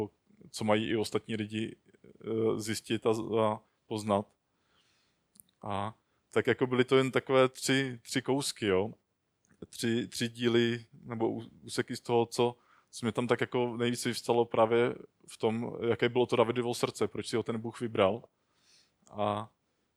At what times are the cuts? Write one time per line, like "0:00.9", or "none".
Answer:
none